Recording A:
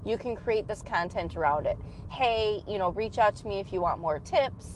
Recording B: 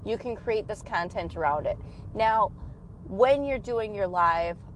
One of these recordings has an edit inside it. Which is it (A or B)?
A